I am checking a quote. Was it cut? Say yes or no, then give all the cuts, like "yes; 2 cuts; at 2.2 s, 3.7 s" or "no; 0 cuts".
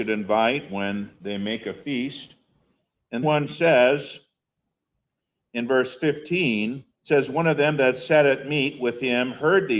yes; 2 cuts; at 3.2 s, 6.9 s